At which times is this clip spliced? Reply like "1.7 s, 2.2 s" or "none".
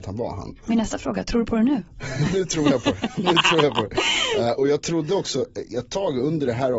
none